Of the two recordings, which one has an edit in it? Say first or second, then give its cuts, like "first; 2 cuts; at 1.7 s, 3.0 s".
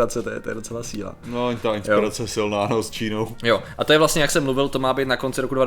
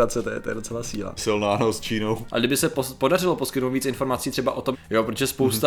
second; 3 cuts; at 1.2 s, 2.3 s, 4.7 s